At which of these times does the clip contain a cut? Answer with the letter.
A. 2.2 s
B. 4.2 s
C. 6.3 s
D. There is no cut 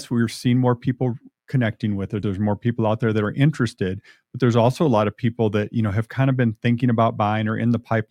D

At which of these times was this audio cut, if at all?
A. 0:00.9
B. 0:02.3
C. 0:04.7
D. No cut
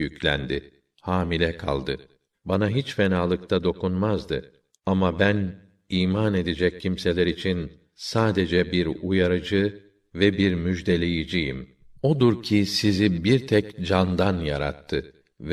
B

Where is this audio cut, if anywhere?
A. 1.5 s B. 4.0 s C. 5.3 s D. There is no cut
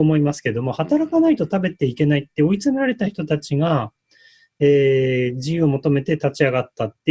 D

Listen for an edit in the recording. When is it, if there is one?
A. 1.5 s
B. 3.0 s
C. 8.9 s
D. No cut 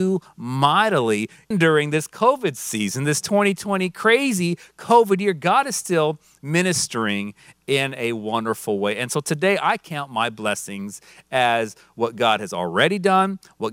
A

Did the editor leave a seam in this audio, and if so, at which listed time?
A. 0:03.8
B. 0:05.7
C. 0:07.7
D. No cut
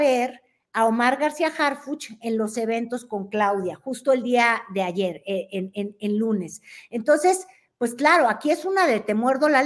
D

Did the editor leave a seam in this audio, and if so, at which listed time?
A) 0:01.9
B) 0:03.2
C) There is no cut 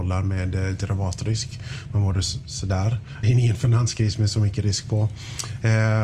B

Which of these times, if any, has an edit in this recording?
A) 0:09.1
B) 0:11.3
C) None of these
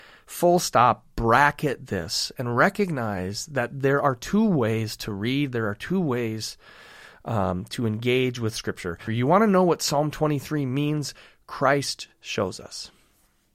A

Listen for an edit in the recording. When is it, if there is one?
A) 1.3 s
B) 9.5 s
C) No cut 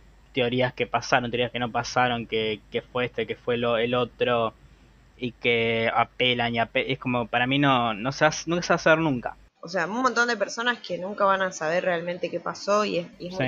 B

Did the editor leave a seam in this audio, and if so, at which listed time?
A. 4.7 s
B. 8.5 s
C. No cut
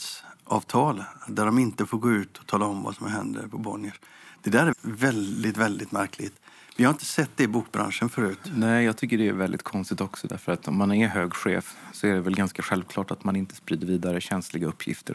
A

